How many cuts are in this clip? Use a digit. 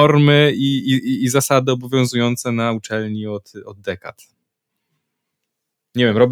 0